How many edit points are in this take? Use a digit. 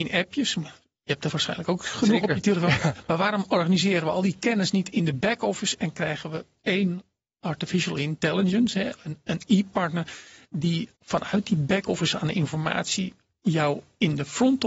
1